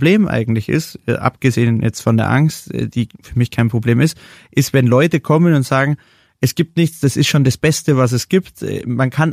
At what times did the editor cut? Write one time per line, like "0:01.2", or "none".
none